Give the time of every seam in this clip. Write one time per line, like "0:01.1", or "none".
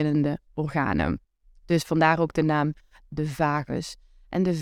none